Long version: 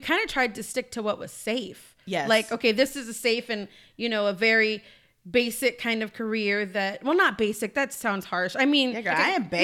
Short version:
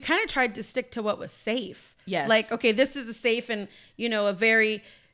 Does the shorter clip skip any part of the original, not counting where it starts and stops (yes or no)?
no